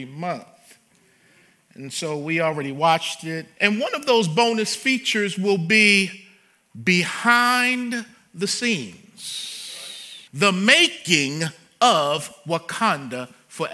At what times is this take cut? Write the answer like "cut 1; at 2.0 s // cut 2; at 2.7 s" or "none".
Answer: cut 1; at 3.6 s // cut 2; at 10.3 s